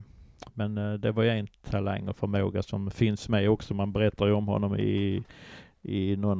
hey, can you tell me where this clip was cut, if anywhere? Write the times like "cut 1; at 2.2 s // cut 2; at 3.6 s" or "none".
none